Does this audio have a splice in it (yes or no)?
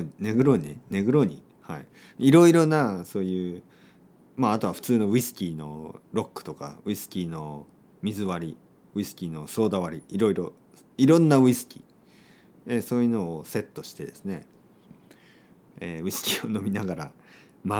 no